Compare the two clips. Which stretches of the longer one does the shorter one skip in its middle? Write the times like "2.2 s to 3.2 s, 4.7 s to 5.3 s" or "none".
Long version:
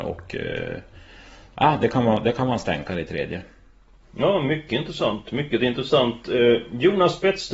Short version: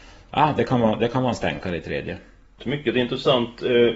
3.8 s to 5.2 s